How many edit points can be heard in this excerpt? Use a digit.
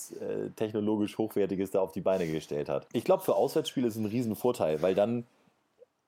1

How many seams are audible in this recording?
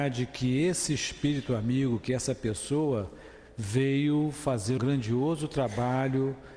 1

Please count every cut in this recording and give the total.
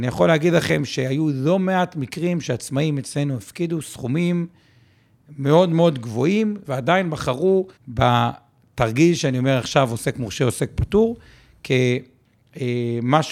2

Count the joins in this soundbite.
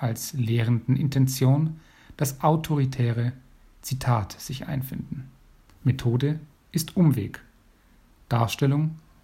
1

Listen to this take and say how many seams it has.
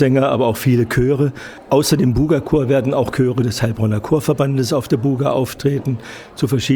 0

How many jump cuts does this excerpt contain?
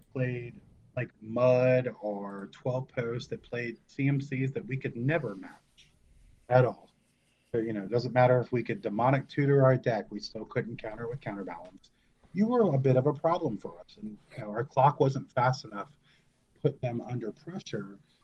0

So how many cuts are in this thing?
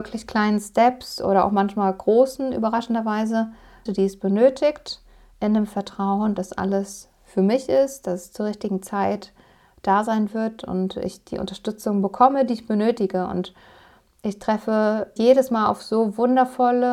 2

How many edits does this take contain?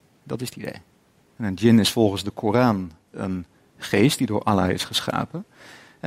1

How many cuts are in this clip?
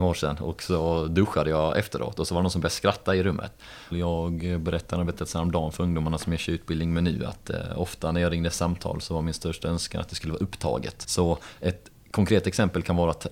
2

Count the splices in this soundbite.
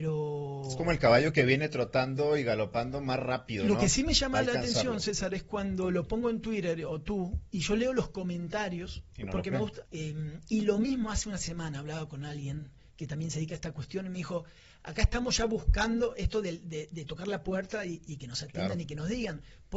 1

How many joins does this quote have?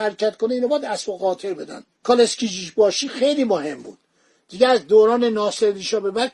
1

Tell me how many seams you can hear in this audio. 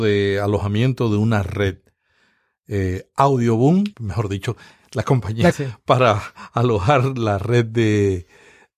2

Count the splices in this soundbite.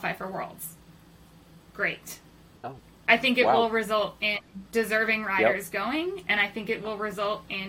1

